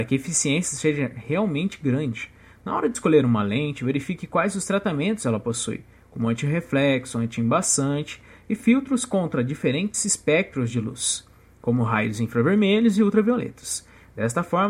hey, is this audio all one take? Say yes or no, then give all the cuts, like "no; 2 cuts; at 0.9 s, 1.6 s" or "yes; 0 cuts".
yes; 0 cuts